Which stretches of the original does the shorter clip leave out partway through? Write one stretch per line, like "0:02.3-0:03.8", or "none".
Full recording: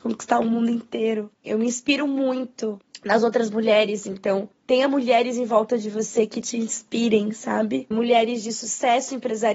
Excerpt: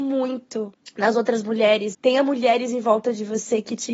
0:04.0-0:04.6